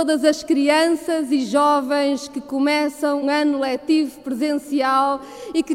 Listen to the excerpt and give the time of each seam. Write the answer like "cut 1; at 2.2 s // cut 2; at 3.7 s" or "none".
cut 1; at 3.2 s